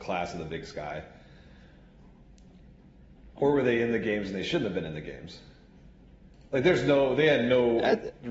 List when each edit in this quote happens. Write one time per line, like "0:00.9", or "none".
0:03.4